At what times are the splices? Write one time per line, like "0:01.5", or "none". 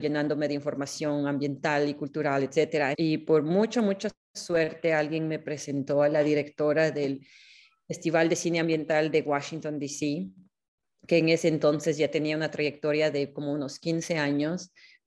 0:02.9